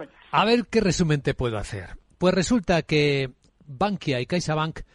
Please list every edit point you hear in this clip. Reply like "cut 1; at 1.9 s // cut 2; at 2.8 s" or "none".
none